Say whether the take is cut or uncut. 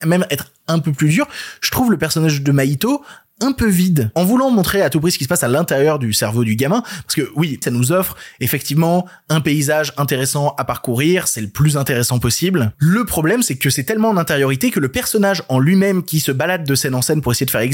cut